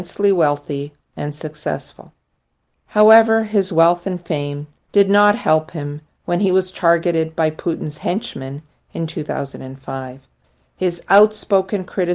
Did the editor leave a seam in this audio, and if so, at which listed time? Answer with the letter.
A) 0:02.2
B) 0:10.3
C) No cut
C